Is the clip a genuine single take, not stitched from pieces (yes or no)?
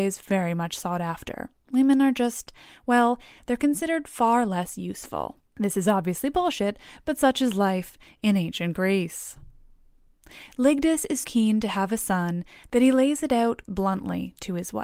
no